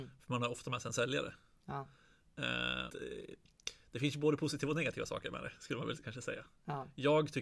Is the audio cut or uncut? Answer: cut